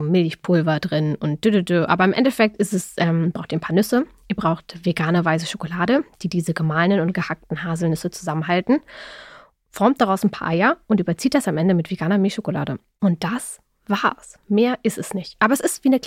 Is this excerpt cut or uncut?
uncut